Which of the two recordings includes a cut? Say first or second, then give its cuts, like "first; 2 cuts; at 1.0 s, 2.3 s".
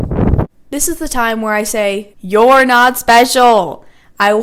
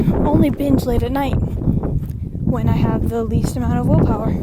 first; 1 cut; at 2.1 s